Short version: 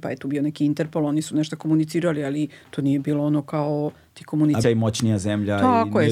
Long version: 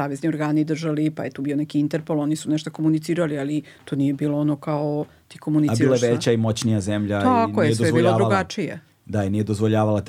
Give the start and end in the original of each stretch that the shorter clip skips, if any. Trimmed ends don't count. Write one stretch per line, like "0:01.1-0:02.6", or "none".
0:05.8-0:06.3